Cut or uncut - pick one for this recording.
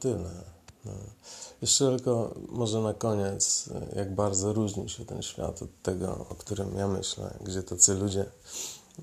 cut